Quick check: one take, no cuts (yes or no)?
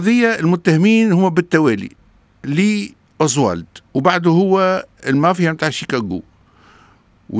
no